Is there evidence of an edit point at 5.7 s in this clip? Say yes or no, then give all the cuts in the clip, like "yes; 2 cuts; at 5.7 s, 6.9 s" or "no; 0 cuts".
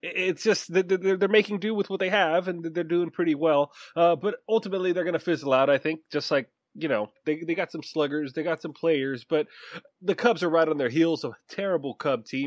no; 1 cut; at 7.2 s